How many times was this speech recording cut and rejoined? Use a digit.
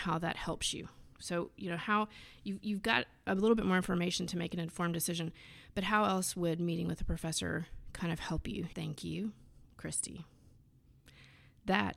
1